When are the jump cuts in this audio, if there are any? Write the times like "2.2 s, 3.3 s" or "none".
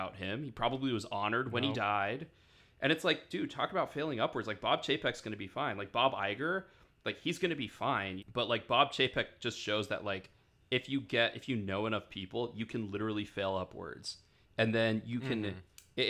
8.2 s